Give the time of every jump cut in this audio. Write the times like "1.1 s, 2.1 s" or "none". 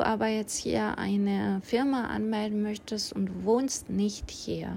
none